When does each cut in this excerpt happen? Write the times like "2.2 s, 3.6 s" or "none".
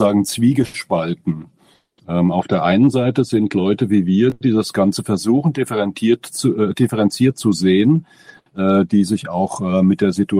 none